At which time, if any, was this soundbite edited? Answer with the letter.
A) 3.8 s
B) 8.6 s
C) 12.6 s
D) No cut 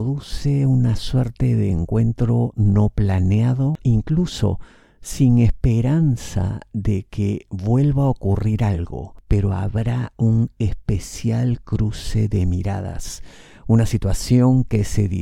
A